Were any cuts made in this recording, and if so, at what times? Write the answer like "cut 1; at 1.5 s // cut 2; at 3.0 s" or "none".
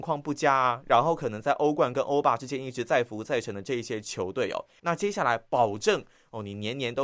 cut 1; at 4.8 s